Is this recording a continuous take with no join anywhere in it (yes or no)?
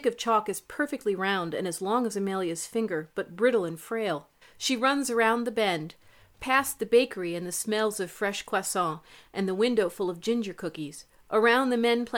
no